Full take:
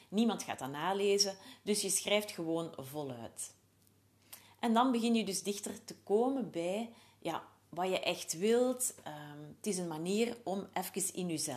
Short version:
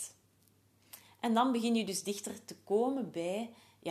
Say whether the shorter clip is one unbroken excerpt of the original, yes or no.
yes